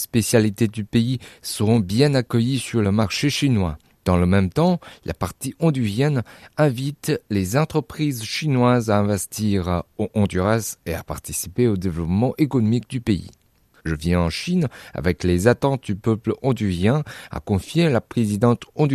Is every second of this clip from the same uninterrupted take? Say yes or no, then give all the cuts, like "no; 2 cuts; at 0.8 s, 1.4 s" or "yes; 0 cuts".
no; 1 cut; at 13.8 s